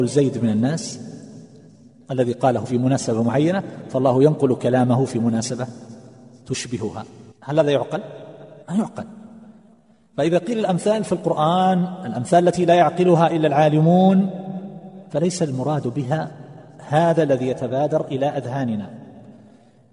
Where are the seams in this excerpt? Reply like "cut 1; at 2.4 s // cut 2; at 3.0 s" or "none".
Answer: cut 1; at 7.3 s // cut 2; at 8.6 s